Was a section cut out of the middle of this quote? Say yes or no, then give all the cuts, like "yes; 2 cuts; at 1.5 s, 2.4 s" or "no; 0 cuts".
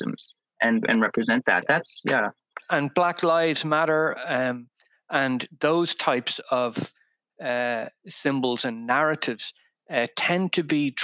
no; 0 cuts